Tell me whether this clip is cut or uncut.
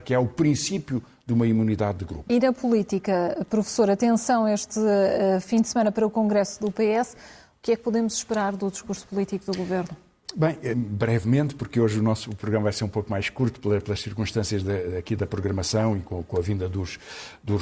cut